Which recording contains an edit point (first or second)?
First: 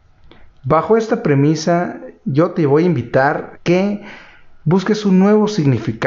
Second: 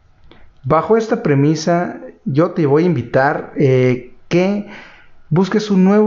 first